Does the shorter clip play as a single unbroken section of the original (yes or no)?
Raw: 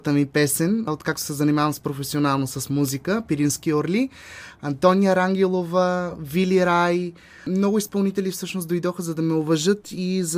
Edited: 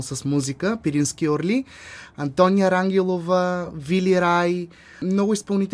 yes